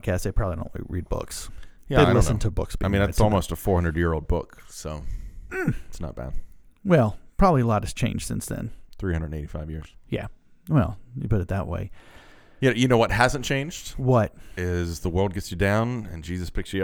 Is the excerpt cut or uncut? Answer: uncut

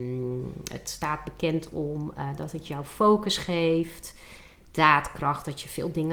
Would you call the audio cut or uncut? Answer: uncut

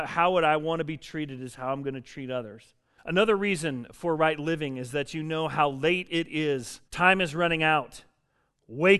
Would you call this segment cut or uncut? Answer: cut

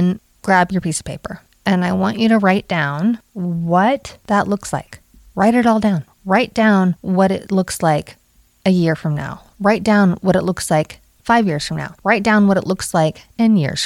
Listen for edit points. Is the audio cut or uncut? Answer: uncut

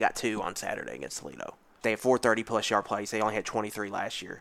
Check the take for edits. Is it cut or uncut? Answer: cut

